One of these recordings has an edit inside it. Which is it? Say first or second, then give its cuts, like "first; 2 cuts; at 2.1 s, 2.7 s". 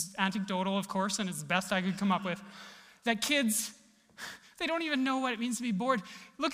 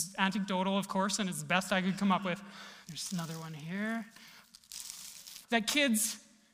second; 2 cuts; at 2.8 s, 5.4 s